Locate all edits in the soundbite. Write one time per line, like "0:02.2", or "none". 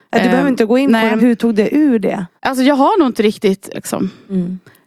0:01.2
0:02.4
0:03.7